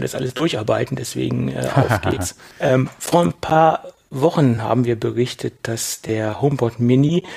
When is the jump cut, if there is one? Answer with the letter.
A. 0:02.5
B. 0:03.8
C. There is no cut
A